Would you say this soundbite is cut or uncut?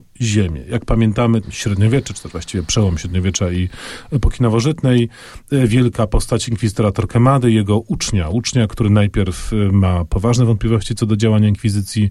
cut